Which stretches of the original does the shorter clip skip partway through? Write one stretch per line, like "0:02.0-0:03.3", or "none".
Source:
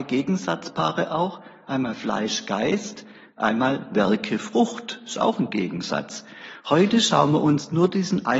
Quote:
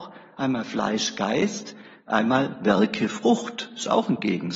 none